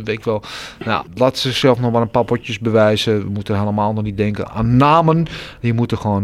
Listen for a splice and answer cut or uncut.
cut